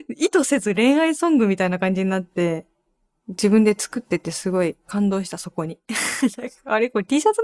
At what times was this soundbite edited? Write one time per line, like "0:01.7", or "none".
none